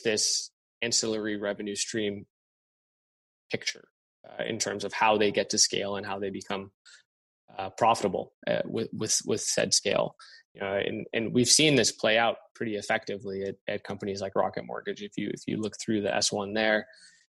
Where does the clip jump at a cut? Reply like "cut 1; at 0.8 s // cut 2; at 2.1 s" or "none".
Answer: none